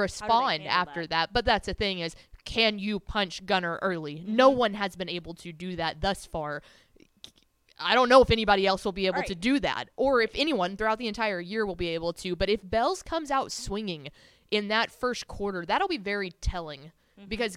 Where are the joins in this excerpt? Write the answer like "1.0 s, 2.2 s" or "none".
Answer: none